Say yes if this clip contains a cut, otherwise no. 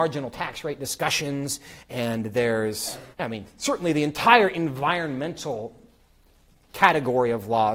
yes